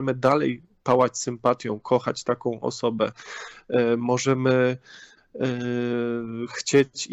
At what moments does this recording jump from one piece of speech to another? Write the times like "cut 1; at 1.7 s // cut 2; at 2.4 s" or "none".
none